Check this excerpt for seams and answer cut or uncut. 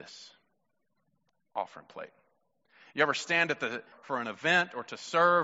cut